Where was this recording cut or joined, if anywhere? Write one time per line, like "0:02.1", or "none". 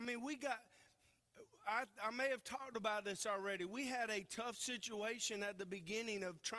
none